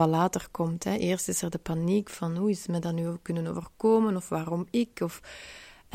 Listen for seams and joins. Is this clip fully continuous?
yes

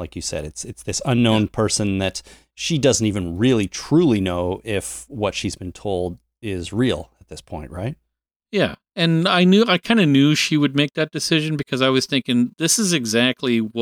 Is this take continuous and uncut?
yes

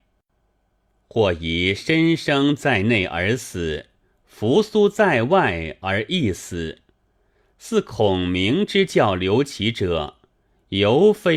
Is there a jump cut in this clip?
no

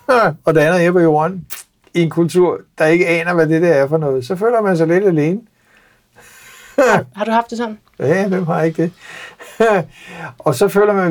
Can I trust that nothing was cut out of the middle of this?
yes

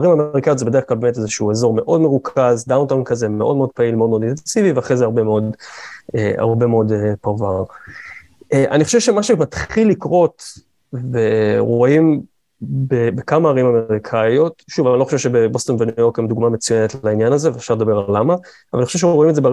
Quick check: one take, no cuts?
yes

